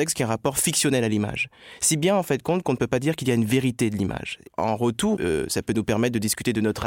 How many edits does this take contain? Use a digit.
1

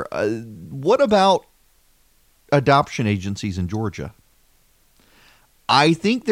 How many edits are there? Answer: 0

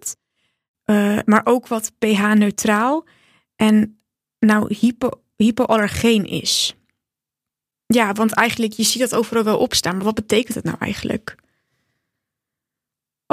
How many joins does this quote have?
0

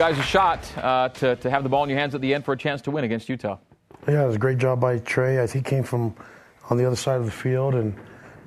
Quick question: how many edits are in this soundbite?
0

